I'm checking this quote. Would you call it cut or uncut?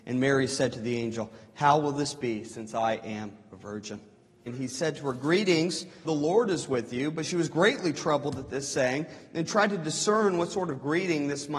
cut